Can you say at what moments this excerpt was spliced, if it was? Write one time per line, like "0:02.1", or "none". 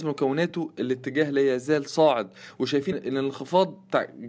0:02.9